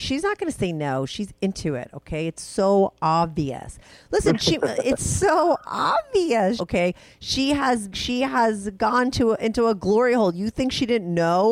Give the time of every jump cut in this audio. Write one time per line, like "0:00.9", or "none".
0:06.6
0:07.9